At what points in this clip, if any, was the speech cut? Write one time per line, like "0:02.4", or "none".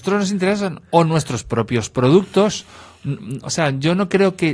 none

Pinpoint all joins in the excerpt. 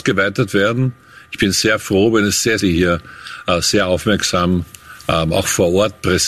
0:02.6

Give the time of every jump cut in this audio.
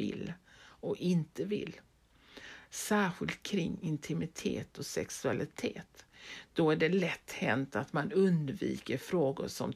none

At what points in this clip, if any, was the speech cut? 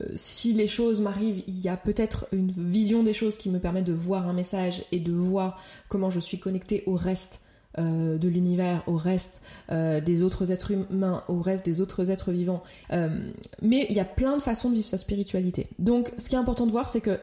0:12.8

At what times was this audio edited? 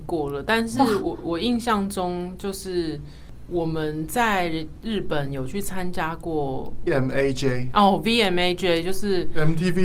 0:06.9

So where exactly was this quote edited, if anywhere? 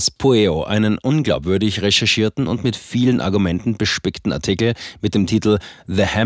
none

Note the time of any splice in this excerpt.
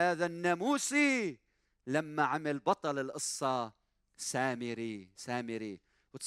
none

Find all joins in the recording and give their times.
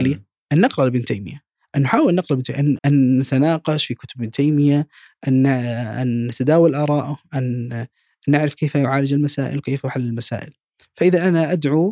0:02.8

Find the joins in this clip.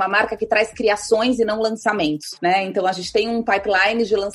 none

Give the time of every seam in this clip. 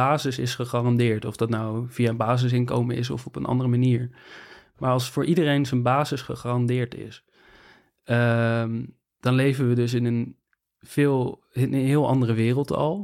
none

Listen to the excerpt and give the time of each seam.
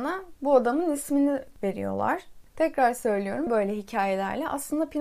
0:03.5

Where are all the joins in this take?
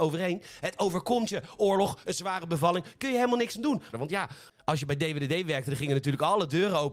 0:02.0
0:03.9

